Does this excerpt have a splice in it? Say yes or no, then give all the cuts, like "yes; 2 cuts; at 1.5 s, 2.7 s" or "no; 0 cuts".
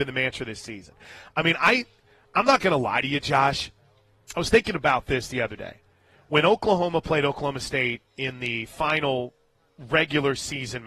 no; 0 cuts